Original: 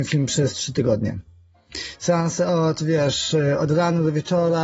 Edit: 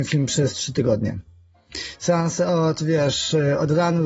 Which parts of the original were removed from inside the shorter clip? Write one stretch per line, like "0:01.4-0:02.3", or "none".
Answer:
none